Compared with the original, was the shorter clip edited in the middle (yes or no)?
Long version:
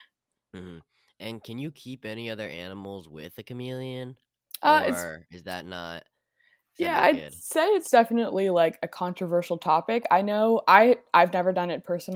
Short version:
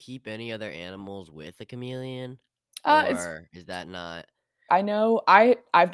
yes